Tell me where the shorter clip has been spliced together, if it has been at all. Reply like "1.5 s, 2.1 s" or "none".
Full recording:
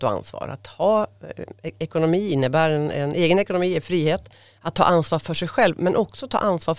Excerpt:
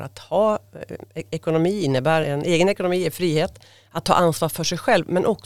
2.2 s